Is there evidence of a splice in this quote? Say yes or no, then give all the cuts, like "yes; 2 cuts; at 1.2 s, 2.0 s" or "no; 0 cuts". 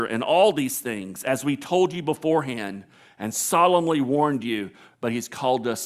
yes; 1 cut; at 4.9 s